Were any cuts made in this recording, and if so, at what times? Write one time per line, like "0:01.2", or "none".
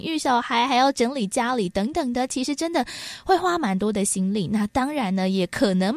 none